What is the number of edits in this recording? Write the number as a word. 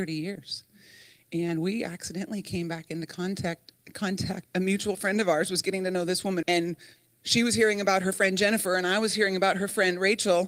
two